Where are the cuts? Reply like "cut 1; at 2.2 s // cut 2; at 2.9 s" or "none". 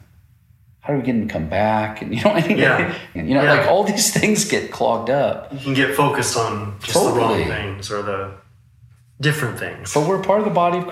cut 1; at 3.2 s